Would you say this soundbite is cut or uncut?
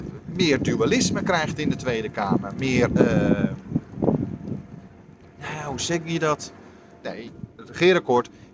cut